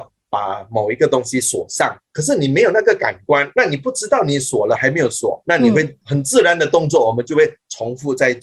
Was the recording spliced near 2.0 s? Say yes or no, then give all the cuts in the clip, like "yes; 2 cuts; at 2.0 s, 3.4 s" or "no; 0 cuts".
no; 0 cuts